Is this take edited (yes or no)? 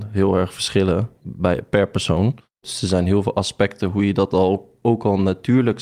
yes